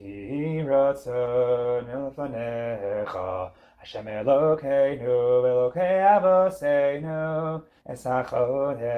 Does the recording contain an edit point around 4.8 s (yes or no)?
no